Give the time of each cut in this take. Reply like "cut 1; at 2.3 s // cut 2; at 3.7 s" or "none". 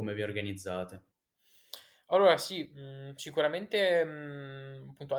none